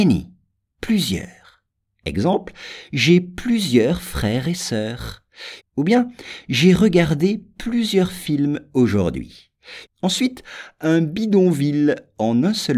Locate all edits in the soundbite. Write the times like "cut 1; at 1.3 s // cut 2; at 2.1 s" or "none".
cut 1; at 5.6 s // cut 2; at 9.9 s